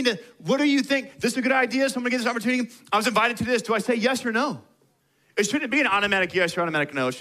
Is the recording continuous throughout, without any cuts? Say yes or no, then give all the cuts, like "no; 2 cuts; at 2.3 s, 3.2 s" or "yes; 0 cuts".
yes; 0 cuts